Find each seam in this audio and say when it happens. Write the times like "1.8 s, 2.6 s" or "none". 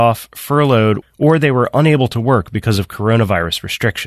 1.0 s